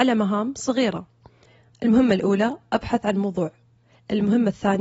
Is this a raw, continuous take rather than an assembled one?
yes; 0 cuts

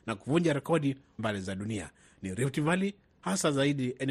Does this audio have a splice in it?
yes; 1 cut; at 1.2 s

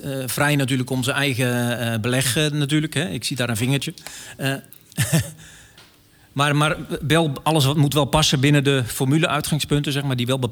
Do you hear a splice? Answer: no; 0 cuts

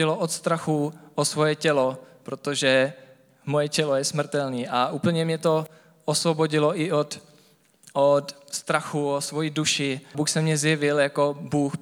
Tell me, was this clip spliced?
yes; 1 cut; at 10.1 s

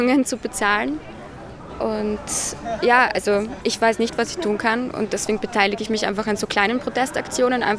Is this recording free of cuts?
yes; 0 cuts

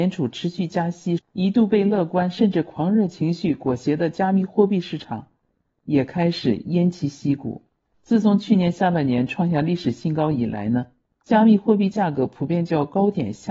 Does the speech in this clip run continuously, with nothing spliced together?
no; 1 cut; at 1.2 s

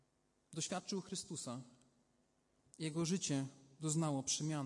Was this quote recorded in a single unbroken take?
yes; 0 cuts

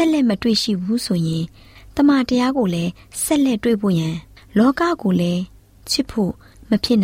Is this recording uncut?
yes; 0 cuts

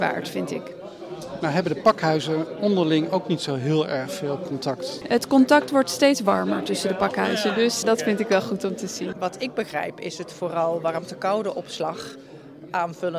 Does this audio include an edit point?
yes; 2 cuts; at 7.8 s, 9.1 s

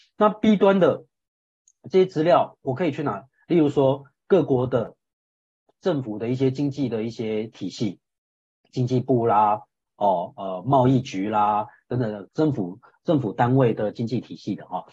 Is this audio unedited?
no; 1 cut; at 12.3 s

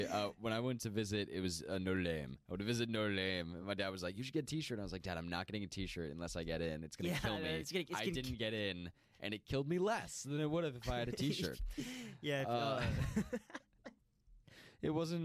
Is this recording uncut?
yes; 0 cuts

